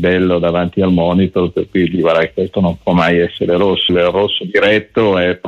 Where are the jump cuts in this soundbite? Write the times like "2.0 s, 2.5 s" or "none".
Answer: 3.9 s